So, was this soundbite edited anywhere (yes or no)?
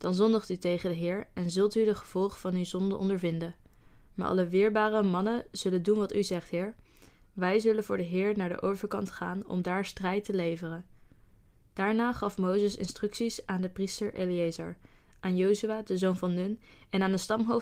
yes